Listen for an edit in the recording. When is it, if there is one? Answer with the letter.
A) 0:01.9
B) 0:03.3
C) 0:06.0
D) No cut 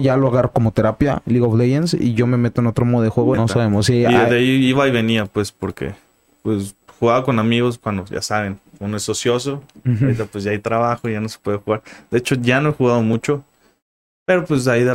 B